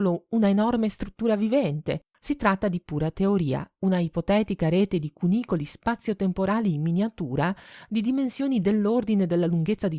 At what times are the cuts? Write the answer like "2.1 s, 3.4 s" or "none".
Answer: 2.1 s